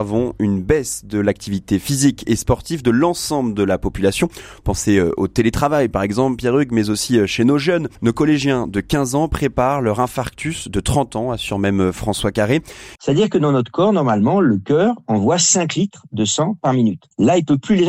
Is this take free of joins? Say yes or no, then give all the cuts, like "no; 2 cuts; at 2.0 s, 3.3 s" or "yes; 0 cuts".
no; 2 cuts; at 8.0 s, 13.0 s